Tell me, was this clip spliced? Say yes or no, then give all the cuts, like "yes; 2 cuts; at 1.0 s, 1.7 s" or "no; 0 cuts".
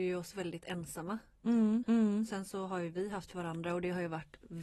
yes; 1 cut; at 1.8 s